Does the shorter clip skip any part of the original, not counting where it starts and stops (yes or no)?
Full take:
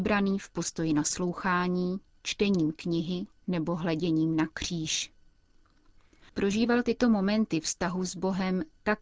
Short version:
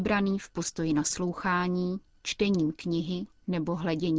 no